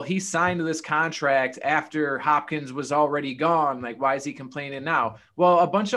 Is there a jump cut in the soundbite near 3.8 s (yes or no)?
no